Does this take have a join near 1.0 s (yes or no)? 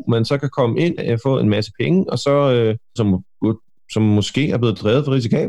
yes